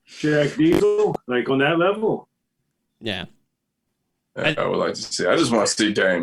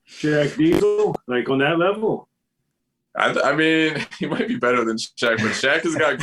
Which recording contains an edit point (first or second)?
first